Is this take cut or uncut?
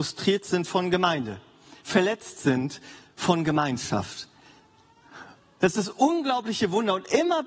cut